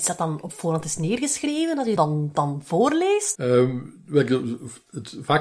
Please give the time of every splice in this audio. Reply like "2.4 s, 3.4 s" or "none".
2.0 s, 3.3 s